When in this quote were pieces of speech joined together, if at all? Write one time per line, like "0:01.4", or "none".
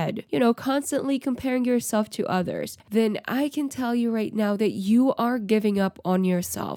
0:02.8